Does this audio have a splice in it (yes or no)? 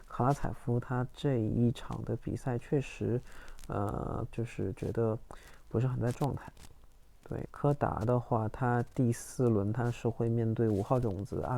yes